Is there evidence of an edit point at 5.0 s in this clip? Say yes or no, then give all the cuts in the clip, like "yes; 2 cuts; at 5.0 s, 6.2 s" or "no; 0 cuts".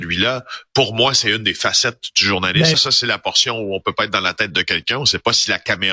no; 1 cut; at 2.7 s